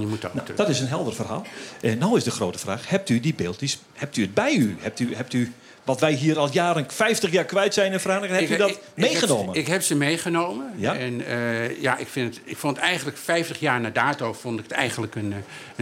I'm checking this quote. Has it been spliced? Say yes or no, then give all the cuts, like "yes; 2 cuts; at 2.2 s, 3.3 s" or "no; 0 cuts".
no; 0 cuts